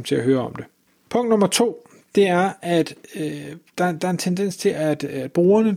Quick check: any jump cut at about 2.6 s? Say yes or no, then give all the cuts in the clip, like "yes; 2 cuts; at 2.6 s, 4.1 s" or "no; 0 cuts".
no; 1 cut; at 1.1 s